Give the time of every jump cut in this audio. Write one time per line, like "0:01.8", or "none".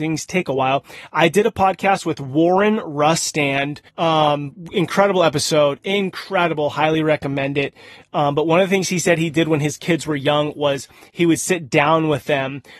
0:03.9